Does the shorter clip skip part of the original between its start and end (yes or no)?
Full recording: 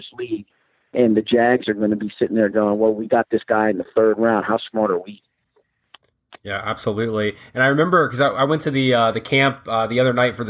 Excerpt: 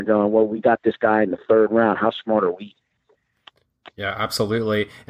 no